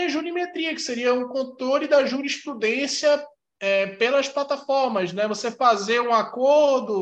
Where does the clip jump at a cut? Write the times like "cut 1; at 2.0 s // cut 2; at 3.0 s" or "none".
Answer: none